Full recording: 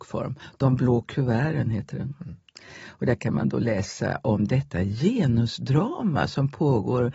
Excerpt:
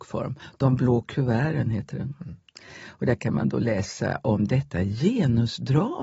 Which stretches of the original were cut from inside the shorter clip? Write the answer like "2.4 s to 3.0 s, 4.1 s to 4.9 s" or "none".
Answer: none